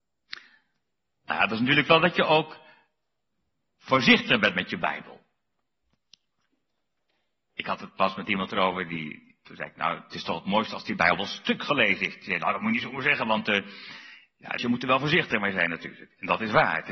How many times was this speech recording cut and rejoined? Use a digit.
1